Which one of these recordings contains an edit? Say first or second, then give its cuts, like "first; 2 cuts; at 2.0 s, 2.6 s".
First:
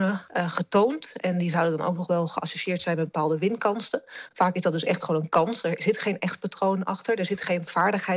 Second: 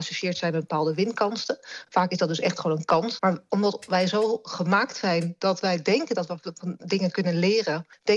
second; 1 cut; at 3.2 s